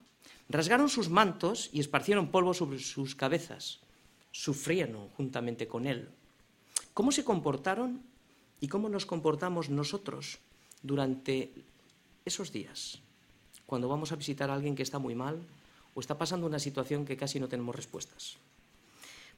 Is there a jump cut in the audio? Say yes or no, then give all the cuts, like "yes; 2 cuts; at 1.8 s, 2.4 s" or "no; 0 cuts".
no; 0 cuts